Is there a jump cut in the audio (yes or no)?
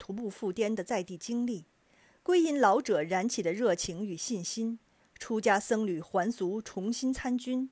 no